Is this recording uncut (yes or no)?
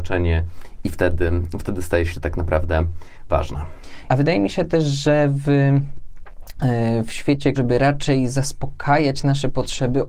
no